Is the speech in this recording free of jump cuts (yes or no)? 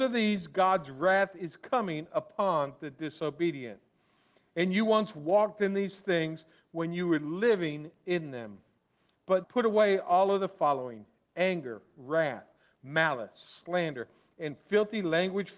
no